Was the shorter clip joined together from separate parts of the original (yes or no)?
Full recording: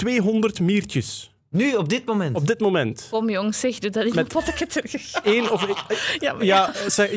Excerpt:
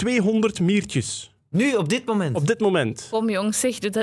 no